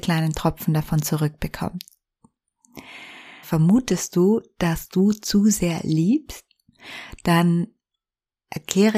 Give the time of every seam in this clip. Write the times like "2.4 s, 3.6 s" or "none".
3.4 s